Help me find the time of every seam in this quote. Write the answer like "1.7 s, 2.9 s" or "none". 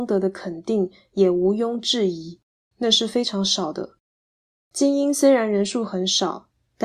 2.6 s, 4.6 s